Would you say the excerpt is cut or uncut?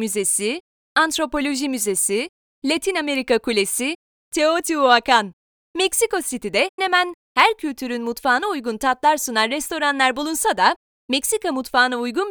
cut